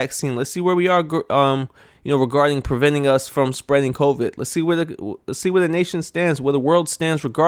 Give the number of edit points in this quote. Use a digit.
0